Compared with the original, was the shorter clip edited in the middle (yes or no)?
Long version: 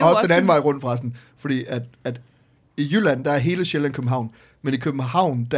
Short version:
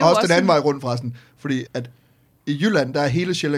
yes